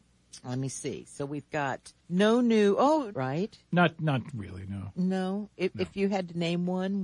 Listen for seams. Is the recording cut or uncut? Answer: cut